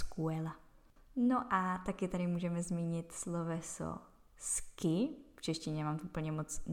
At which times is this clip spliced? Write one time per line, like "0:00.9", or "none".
0:01.0